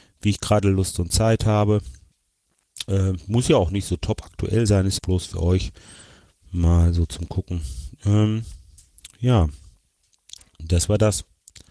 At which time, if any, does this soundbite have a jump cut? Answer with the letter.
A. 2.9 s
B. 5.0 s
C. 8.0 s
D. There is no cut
B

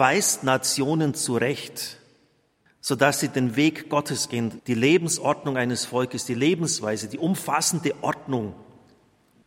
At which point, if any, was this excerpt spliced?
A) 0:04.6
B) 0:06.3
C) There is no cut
A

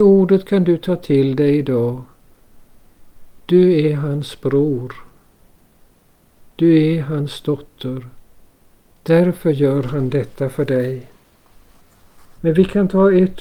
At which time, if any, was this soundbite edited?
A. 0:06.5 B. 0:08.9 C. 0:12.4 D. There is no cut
C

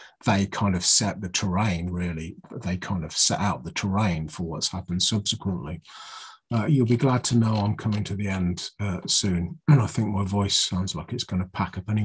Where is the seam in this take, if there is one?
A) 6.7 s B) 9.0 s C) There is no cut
C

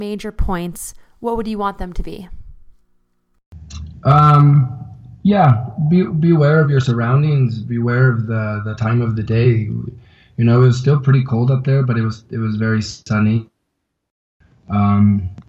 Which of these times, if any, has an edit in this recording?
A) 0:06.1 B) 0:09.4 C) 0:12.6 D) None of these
D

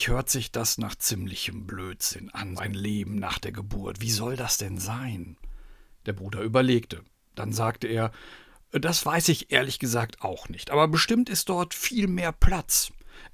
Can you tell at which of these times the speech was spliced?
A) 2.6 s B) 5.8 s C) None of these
A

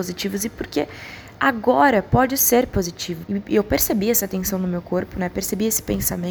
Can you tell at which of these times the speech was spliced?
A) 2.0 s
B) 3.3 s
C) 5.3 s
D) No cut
B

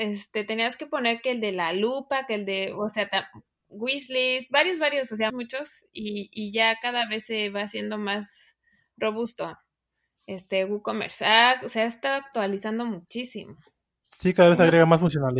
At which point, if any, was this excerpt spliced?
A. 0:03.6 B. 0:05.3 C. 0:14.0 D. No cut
B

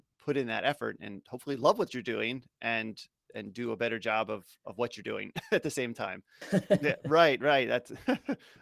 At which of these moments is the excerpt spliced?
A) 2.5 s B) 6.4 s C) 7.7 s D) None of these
B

